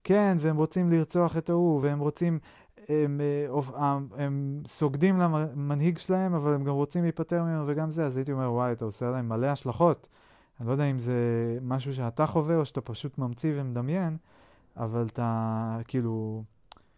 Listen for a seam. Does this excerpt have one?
no; 0 cuts

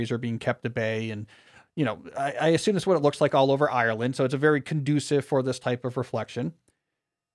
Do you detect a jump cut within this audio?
no; 0 cuts

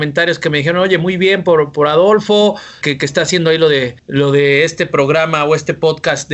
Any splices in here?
yes; 2 cuts; at 2.8 s, 4.0 s

